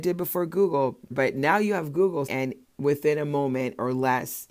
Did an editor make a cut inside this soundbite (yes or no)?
yes